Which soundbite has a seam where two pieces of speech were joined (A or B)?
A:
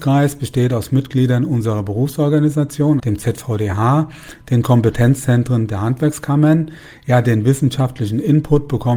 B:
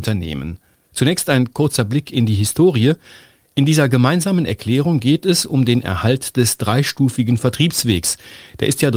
A